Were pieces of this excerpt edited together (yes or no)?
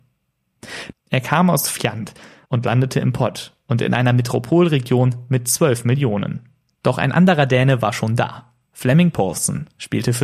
yes